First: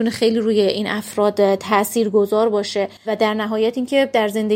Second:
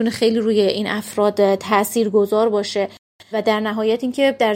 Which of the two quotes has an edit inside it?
first; 1 cut; at 3.0 s

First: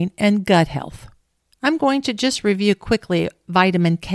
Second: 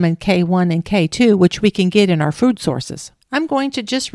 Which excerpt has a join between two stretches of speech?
second; 1 cut; at 3.2 s

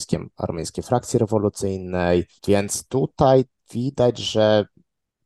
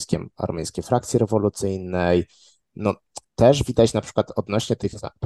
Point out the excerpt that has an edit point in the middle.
first; 1 cut; at 2.4 s

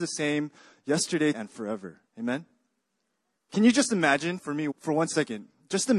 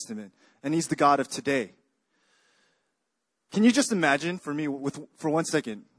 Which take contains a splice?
first; 3 cuts; at 1.3 s, 3.4 s, 4.7 s

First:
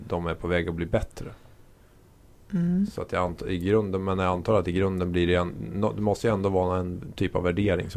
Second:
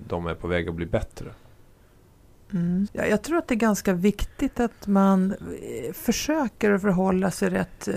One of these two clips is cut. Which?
second; 1 cut; at 2.9 s

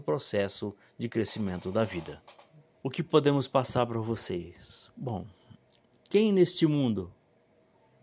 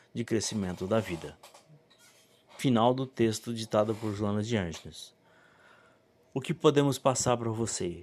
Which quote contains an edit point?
first; 1 cut; at 2.7 s

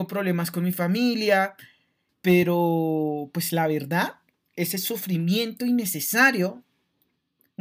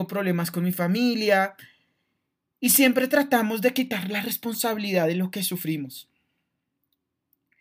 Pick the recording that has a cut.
first; 1 cut; at 2.1 s

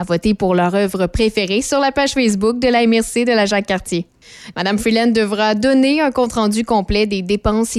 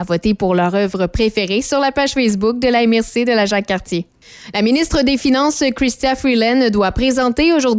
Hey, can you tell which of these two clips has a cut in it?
first; 1 cut; at 4.5 s

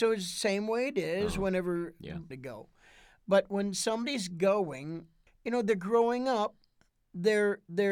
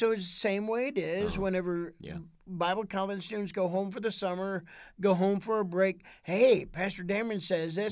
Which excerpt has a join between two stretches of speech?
first; 2 cuts; at 2.3 s, 5.3 s

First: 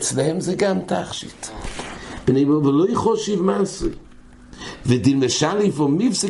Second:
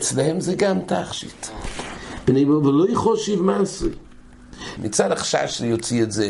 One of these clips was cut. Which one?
second; 1 cut; at 4.8 s

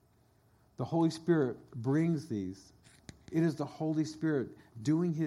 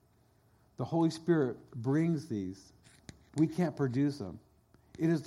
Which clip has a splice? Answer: first; 1 cut; at 3.2 s

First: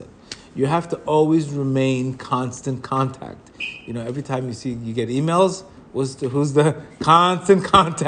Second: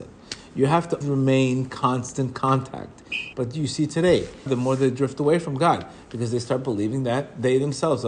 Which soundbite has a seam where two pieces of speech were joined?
second; 3 cuts; at 1.0 s, 3.3 s, 4.5 s

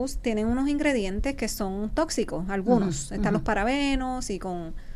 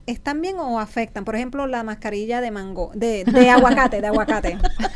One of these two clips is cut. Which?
second; 1 cut; at 3.2 s

